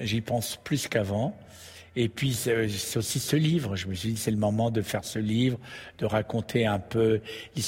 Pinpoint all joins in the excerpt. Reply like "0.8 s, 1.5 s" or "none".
none